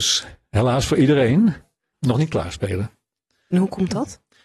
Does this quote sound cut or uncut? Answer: uncut